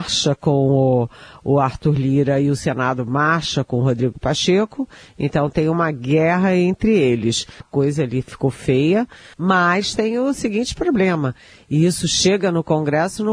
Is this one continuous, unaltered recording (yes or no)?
no